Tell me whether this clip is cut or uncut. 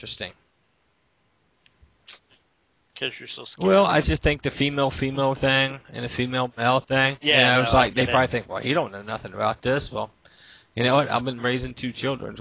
uncut